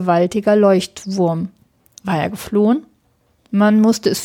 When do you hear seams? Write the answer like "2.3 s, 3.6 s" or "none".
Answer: none